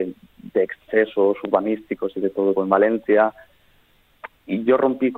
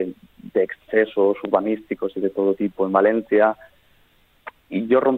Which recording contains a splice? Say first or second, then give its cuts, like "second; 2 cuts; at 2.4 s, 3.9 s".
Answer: first; 1 cut; at 2.6 s